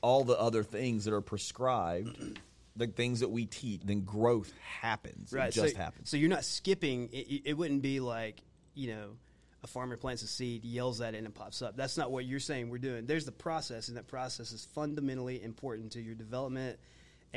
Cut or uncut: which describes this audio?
cut